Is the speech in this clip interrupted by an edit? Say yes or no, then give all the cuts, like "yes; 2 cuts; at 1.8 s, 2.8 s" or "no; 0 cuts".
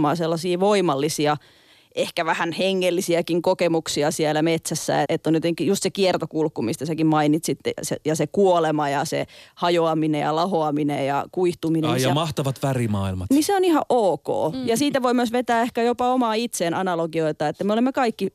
yes; 1 cut; at 5.0 s